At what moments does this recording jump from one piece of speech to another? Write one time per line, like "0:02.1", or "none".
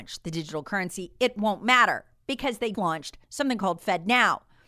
0:02.7